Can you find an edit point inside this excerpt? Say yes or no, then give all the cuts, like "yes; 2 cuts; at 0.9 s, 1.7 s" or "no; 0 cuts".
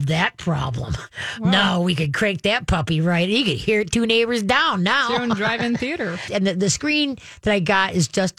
yes; 1 cut; at 6.3 s